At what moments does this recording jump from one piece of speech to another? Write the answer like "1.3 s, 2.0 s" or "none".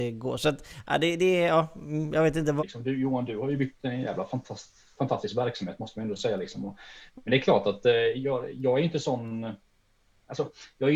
2.6 s